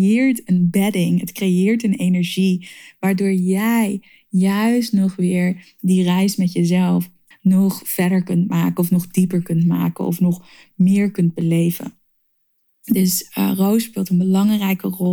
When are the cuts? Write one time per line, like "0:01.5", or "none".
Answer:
0:07.3